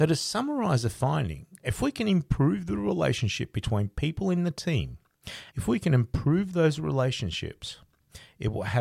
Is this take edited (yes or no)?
yes